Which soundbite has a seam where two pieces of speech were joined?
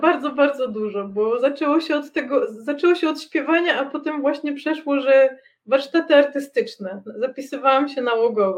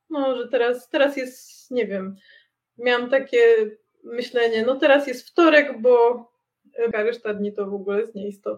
second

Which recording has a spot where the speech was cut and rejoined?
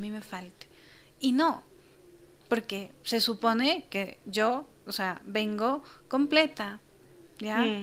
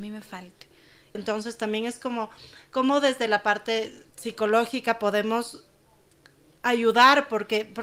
second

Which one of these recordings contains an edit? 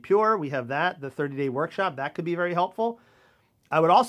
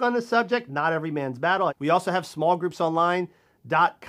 second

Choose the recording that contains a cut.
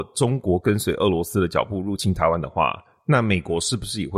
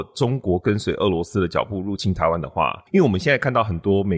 second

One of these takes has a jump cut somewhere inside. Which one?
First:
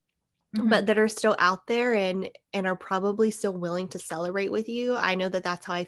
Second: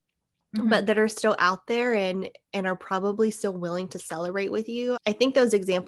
second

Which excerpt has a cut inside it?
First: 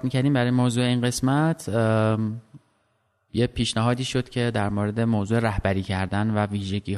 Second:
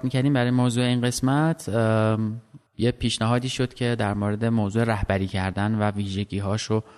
second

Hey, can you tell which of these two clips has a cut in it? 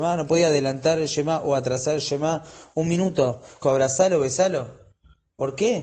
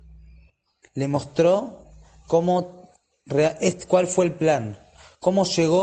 first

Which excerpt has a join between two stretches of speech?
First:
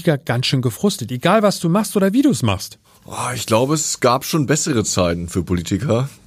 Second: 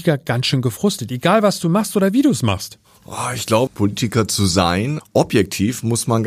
second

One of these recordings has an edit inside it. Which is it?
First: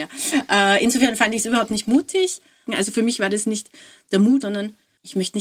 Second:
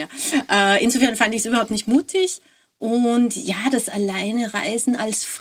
first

